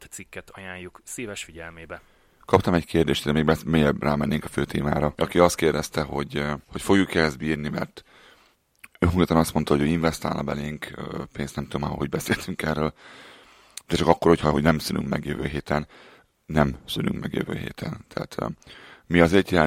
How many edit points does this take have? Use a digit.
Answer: 3